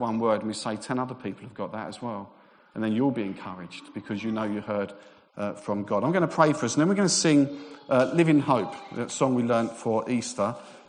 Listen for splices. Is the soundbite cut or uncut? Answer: uncut